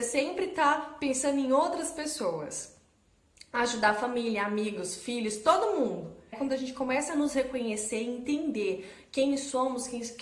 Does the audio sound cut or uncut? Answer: cut